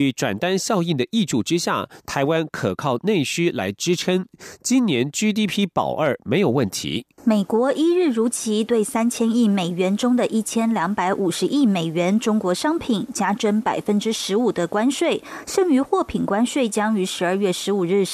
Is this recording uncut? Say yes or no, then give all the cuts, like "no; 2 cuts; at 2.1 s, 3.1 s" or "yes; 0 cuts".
no; 1 cut; at 7.1 s